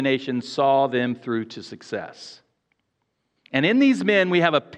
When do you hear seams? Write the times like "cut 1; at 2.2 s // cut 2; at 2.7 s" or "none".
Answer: cut 1; at 3.4 s